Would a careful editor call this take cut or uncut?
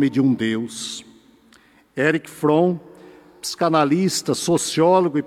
uncut